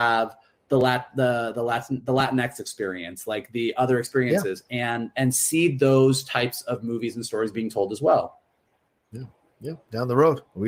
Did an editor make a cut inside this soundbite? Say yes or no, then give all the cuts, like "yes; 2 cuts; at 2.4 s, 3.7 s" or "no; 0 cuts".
no; 0 cuts